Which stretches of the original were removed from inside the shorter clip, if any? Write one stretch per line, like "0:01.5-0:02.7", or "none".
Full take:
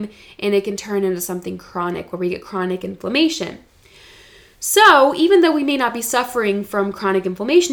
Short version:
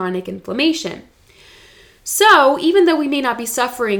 none